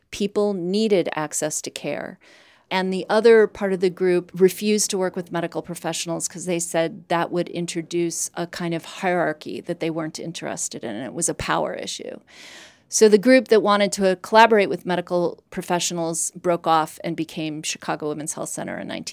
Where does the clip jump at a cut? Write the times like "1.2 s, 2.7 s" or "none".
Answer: none

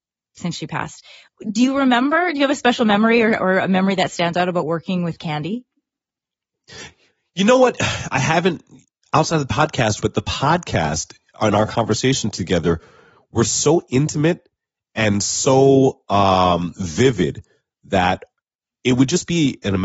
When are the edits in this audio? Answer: 10.0 s

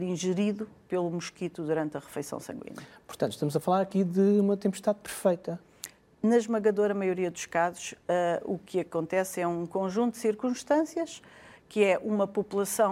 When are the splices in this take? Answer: 6.1 s

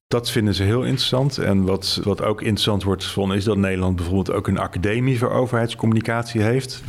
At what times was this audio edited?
2.0 s

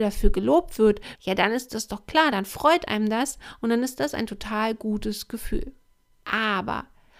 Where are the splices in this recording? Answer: 1.2 s

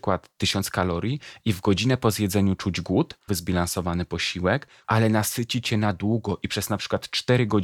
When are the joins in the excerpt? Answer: 3.3 s, 4.8 s

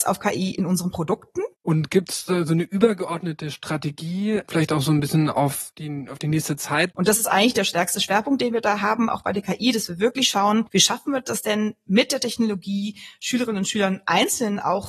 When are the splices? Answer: 1.5 s, 6.9 s

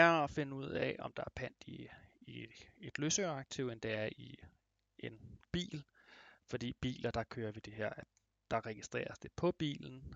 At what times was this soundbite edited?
none

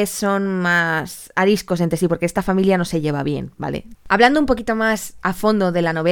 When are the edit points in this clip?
3.9 s

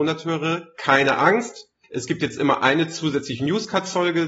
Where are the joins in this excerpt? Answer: 1.8 s

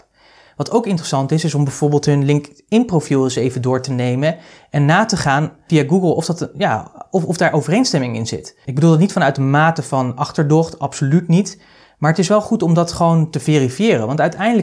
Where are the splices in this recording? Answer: none

